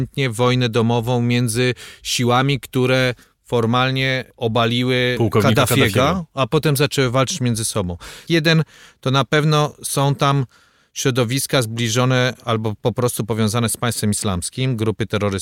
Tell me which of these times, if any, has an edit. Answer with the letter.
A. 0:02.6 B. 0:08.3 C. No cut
B